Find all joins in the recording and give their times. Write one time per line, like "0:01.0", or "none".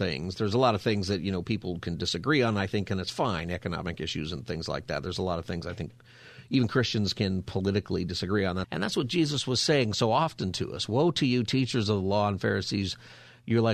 0:08.6